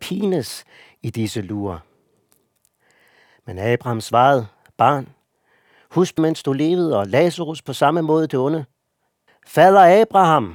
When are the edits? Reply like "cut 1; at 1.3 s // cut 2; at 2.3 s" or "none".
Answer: cut 1; at 6.2 s // cut 2; at 9.3 s